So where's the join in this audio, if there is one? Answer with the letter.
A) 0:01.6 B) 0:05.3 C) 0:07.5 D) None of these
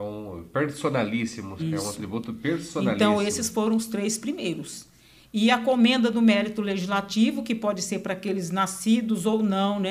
A